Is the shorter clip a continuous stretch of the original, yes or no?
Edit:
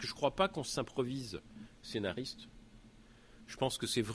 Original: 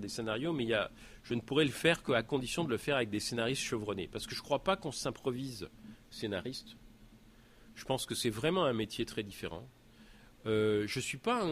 yes